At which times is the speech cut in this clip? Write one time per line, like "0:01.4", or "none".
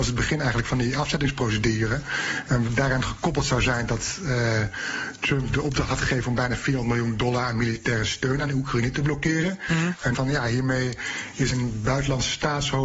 0:10.1
0:11.5